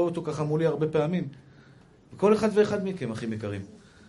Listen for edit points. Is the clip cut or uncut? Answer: uncut